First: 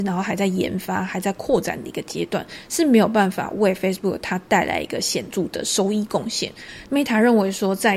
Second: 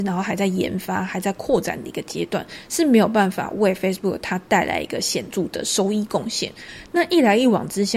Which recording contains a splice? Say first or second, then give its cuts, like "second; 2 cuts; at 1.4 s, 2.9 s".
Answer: first; 1 cut; at 6.8 s